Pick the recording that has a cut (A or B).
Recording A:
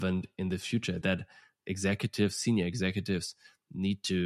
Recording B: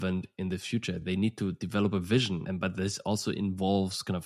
A